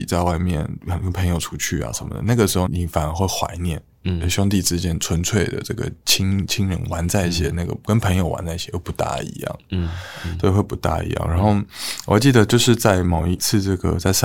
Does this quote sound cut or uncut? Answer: cut